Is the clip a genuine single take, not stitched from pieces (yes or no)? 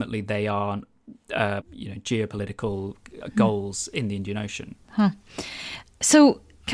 no